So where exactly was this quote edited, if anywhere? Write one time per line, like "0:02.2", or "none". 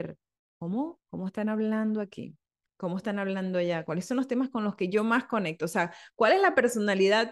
none